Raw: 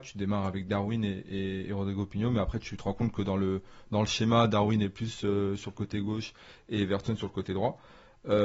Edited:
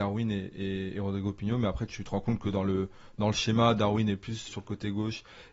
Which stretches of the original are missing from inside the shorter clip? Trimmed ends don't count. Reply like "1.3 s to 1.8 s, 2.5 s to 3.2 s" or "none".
5.2 s to 5.6 s

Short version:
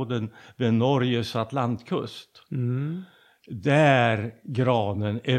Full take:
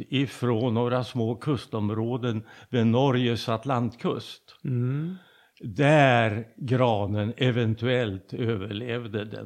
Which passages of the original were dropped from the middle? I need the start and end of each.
none

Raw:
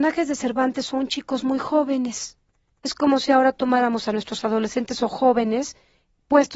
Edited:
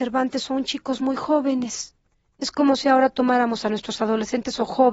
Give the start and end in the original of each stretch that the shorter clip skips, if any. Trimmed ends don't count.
none

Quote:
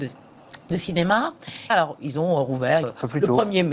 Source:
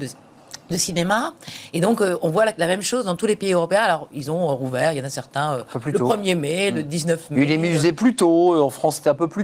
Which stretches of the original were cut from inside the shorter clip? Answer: 1.7 s to 3.8 s, 4.9 s to 5.5 s

